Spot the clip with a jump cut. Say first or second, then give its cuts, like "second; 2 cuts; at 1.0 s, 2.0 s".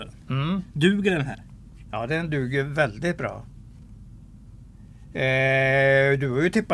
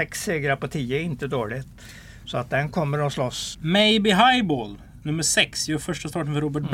second; 1 cut; at 3.5 s